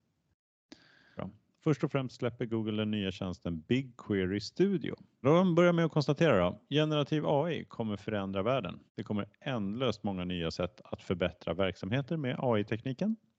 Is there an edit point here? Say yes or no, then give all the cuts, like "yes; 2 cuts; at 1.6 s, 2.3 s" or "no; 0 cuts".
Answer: yes; 3 cuts; at 1.2 s, 5.2 s, 8.9 s